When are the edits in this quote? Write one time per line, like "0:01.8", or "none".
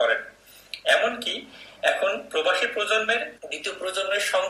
0:03.4